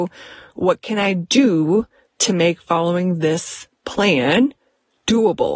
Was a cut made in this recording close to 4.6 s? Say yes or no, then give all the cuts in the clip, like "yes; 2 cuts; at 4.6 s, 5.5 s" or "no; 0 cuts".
no; 0 cuts